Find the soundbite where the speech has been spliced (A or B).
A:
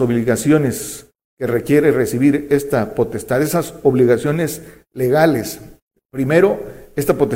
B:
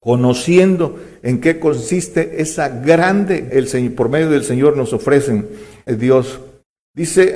B